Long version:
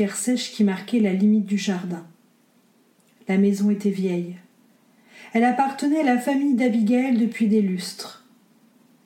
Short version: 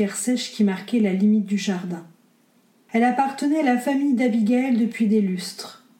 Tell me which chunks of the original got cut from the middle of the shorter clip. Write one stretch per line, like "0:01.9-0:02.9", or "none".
0:02.9-0:05.3